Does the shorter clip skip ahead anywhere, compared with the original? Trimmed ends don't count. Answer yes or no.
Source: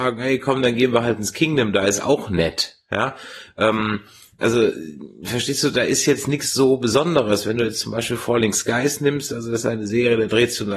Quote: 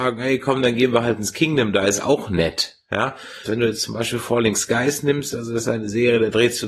yes